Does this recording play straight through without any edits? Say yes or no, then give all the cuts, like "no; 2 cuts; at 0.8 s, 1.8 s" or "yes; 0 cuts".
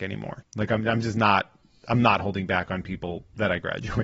yes; 0 cuts